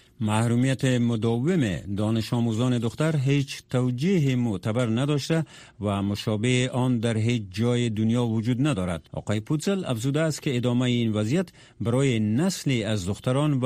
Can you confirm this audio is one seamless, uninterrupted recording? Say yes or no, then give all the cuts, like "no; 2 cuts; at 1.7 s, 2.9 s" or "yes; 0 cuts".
no; 1 cut; at 9.1 s